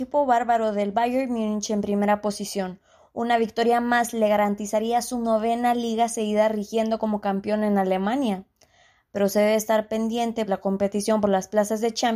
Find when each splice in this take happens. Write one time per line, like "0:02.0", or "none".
0:10.5

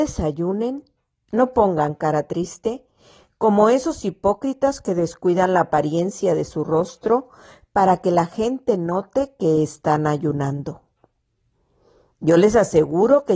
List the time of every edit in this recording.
none

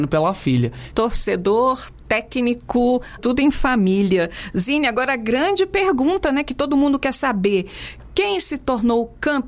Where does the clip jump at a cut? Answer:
0:00.9
0:03.2

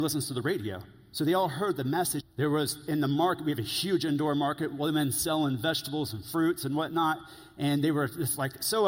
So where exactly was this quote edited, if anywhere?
0:02.2

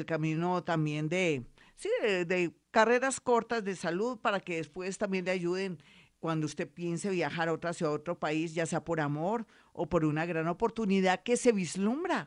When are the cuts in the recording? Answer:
none

